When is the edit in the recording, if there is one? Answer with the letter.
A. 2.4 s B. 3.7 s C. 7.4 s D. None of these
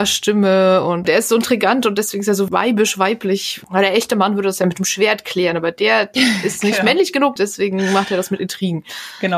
C